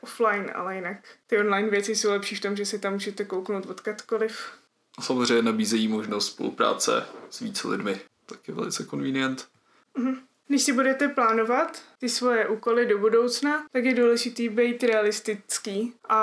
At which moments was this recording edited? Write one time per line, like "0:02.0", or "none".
none